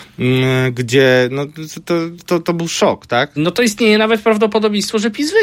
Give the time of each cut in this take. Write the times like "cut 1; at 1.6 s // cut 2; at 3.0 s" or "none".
cut 1; at 2.2 s // cut 2; at 3.4 s

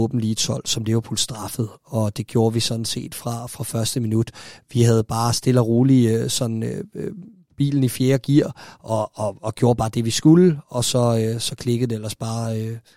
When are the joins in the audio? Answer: none

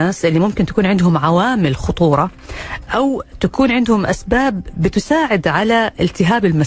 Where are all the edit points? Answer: none

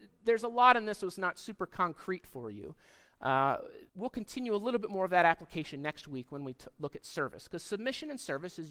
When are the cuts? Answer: cut 1; at 3.9 s

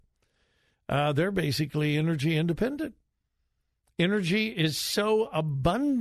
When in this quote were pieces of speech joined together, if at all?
none

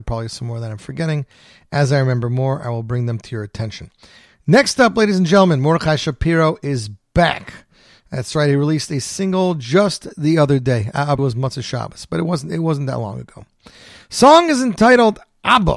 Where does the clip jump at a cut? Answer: cut 1; at 11.2 s

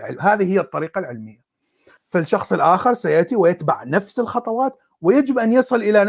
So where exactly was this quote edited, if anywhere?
cut 1; at 2.0 s

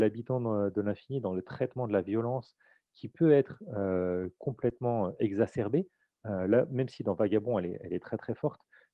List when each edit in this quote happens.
none

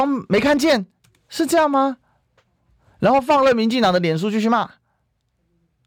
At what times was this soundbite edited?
none

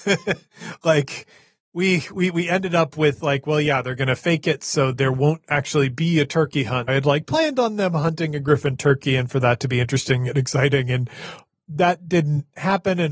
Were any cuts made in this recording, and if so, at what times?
cut 1; at 6.9 s

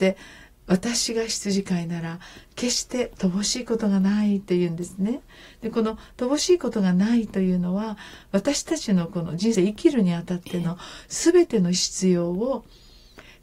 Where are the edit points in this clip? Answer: cut 1; at 9.6 s

